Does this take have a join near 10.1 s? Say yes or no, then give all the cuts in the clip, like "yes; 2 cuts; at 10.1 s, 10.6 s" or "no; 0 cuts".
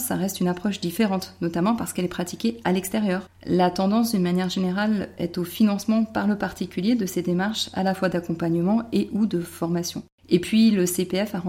no; 1 cut; at 3.3 s